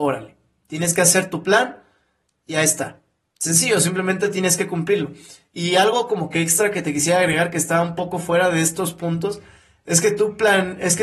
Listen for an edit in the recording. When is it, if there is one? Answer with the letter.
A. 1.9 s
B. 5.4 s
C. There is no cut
C